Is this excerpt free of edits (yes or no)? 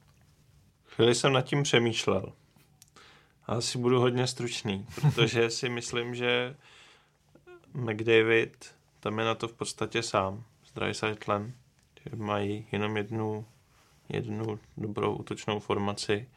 yes